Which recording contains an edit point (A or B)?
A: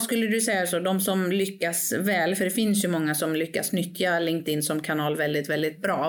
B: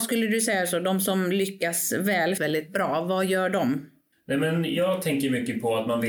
B